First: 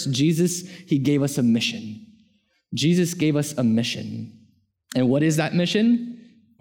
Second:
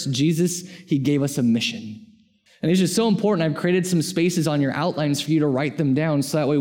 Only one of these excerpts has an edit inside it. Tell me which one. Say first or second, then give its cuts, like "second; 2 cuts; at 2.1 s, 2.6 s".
second; 1 cut; at 2.5 s